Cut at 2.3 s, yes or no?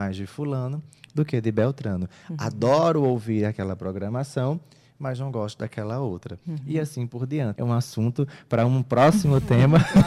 no